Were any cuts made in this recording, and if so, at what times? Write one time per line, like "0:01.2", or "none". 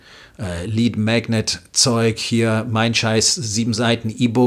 none